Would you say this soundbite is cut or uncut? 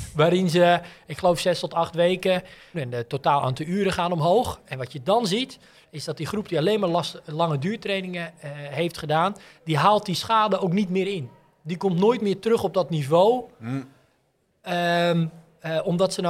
cut